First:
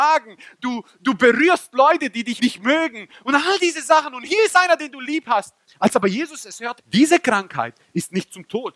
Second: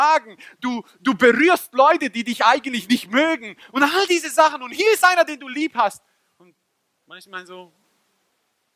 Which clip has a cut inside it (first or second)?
first